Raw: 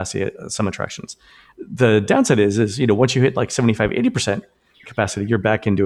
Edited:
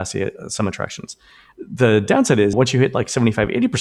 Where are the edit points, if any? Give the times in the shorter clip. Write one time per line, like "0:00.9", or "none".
0:02.5